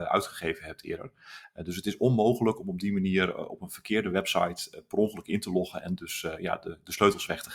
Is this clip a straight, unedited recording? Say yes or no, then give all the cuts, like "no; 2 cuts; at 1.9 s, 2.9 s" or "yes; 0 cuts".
yes; 0 cuts